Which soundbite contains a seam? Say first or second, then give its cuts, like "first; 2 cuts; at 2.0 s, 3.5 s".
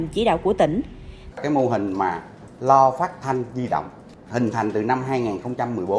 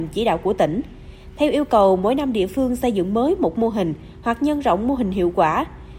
first; 1 cut; at 1.3 s